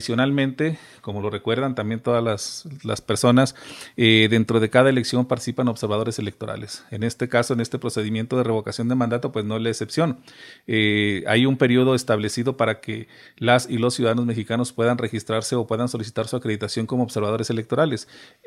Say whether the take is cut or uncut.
uncut